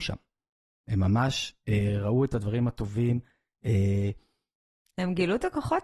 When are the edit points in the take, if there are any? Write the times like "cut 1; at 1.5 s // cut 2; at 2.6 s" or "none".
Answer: none